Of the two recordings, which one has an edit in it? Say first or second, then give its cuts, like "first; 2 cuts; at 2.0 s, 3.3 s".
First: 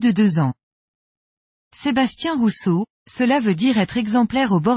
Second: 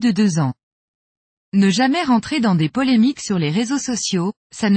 second; 1 cut; at 1.5 s